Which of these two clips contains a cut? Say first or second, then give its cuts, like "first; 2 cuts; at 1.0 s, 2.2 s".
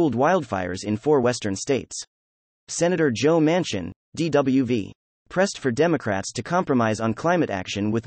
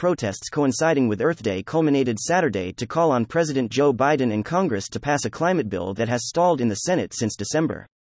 first; 1 cut; at 2.5 s